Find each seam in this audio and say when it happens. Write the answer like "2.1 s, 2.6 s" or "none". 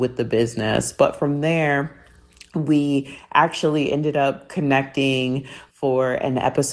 none